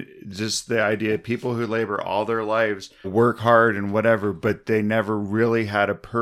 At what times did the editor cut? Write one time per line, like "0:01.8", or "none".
0:03.0